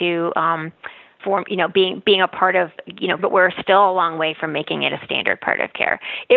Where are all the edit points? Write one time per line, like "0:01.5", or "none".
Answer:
0:01.2
0:03.2